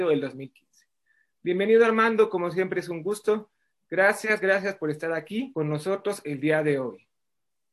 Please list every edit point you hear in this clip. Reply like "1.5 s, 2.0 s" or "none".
none